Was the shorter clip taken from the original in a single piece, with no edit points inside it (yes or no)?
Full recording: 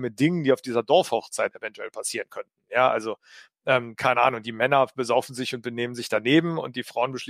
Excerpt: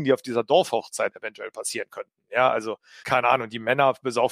no